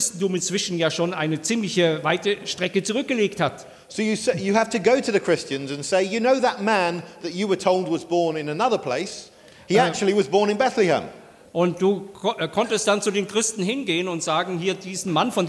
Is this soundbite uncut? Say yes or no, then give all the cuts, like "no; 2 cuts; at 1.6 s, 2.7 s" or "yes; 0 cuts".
yes; 0 cuts